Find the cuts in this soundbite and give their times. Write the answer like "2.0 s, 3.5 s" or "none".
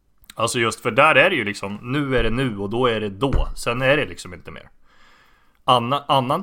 none